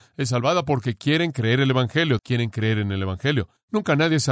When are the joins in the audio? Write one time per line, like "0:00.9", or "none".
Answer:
0:02.2